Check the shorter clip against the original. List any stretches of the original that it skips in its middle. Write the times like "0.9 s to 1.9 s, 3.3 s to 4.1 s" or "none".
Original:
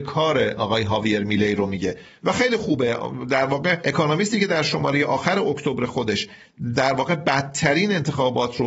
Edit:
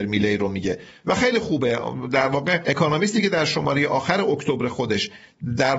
none